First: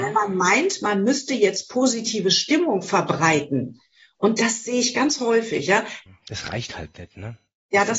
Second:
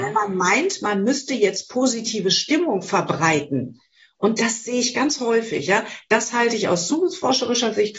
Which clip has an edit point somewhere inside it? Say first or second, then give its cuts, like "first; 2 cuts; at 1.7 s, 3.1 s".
first; 1 cut; at 6.1 s